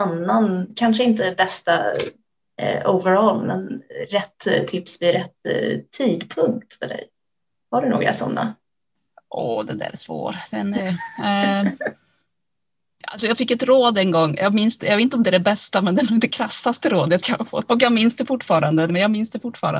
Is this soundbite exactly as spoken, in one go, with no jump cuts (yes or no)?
no